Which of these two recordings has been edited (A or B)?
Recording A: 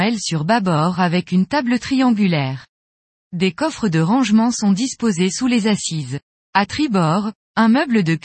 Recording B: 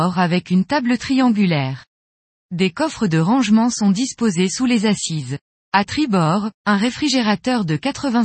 B